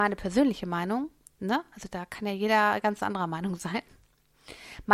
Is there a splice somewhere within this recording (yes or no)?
no